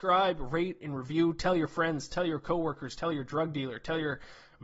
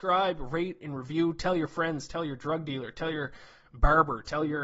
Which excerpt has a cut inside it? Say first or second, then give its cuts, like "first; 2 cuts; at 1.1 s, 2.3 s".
second; 1 cut; at 2.1 s